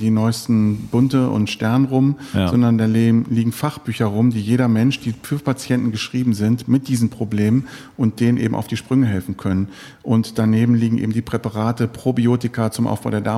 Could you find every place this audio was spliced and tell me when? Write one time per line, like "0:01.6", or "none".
none